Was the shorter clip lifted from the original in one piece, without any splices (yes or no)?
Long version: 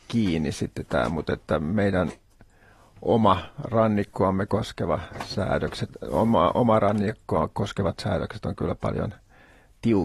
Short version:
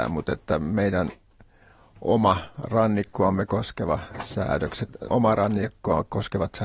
no